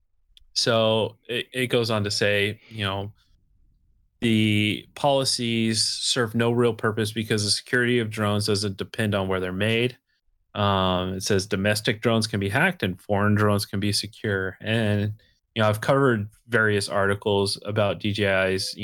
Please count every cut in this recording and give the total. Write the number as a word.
zero